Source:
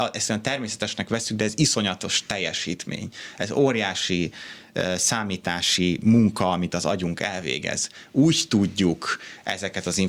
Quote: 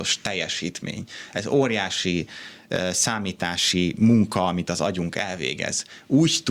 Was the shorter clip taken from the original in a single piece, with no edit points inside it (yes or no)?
yes